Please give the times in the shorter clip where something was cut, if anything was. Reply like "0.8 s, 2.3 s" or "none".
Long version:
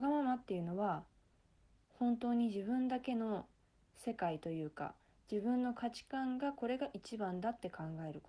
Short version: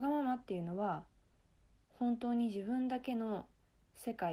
none